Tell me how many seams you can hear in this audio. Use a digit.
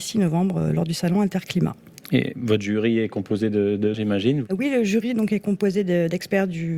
2